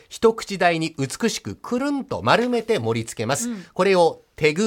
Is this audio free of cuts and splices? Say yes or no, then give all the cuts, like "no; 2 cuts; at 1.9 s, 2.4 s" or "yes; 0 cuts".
yes; 0 cuts